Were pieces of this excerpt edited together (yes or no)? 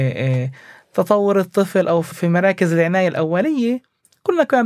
yes